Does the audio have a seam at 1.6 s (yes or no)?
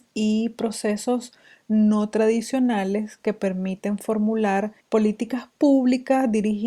no